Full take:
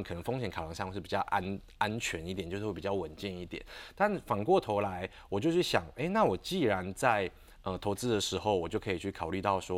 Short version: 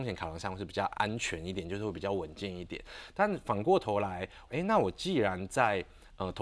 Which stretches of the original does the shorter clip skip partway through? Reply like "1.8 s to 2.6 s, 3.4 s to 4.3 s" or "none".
1.3 s to 1.8 s, 5.3 s to 5.9 s